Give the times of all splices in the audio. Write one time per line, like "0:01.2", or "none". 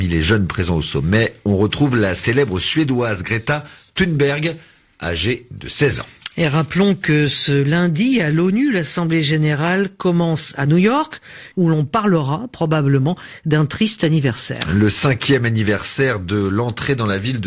0:11.5